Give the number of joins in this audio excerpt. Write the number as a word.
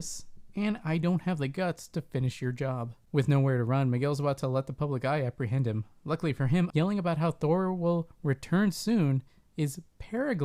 one